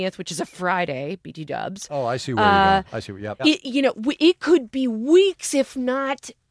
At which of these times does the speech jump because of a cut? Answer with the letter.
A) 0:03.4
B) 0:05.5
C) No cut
A